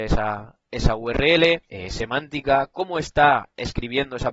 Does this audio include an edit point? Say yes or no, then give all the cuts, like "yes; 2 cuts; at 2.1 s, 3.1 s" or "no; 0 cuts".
yes; 1 cut; at 1.7 s